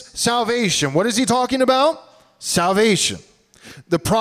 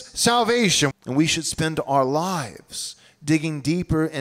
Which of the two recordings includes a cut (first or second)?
second